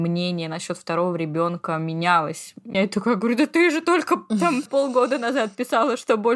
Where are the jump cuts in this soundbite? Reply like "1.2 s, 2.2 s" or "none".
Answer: 2.7 s, 4.7 s